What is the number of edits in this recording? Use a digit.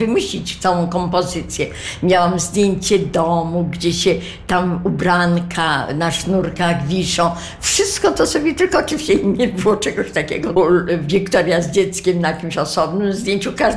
1